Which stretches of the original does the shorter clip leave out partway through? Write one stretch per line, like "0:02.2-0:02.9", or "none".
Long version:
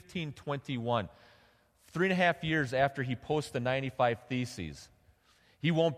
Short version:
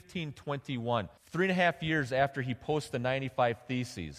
0:01.2-0:01.8